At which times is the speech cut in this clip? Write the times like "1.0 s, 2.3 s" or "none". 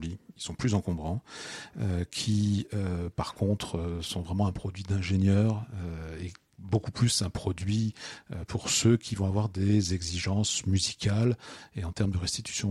none